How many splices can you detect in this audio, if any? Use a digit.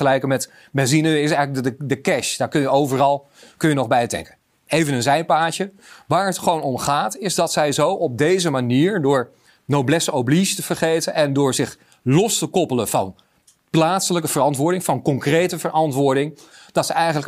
0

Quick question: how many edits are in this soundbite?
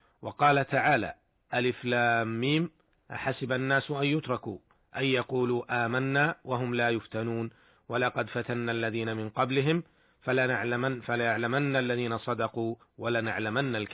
0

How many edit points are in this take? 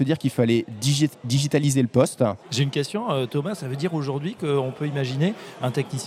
1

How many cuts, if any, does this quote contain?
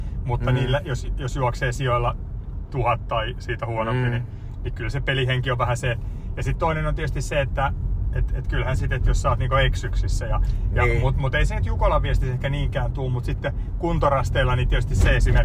0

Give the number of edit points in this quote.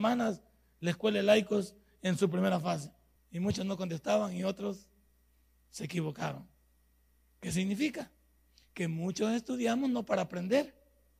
1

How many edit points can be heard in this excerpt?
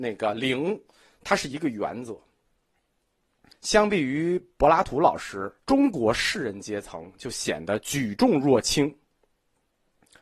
2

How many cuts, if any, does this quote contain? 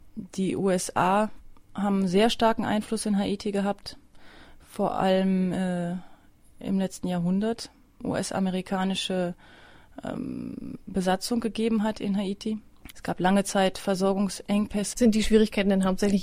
3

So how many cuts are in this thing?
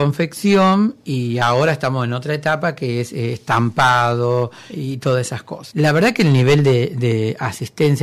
0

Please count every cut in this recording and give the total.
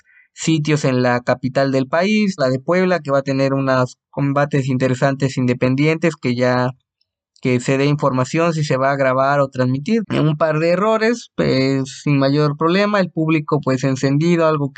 2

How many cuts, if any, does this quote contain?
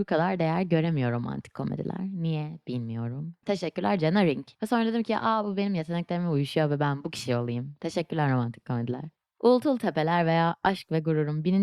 2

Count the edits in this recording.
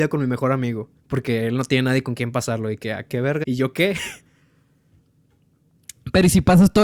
2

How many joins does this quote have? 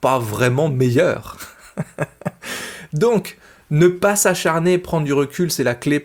0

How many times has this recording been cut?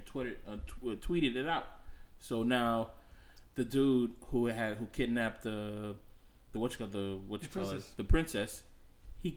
0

